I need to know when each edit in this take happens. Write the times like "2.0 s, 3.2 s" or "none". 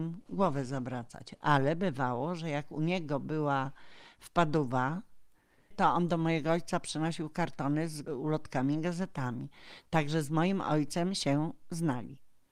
5.7 s